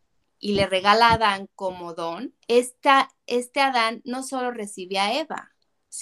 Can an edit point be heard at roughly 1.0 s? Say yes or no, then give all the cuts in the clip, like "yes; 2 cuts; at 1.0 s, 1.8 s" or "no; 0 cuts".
no; 1 cut; at 2.4 s